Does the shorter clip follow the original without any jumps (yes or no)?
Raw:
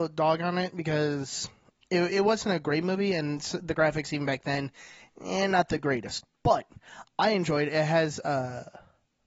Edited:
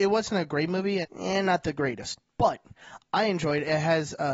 no